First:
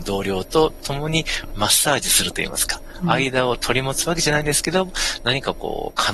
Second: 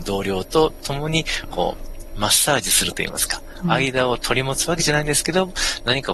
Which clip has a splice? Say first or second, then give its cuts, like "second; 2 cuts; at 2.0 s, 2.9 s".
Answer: first; 1 cut; at 1.5 s